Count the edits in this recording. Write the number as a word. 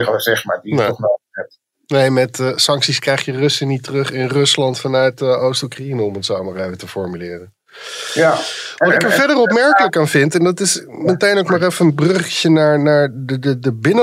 zero